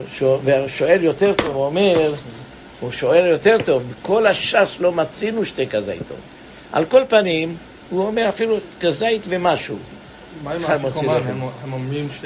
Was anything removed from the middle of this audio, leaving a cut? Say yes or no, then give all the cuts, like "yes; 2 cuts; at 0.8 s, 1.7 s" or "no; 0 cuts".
no; 0 cuts